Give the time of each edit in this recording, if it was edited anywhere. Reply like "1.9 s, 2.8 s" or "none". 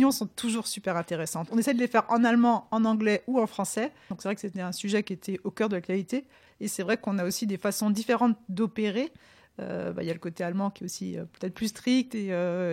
4.1 s, 6.5 s